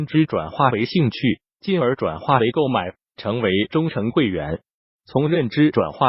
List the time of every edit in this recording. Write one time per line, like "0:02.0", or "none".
none